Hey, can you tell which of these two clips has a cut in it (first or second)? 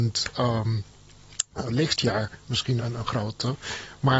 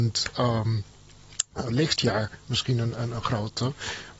first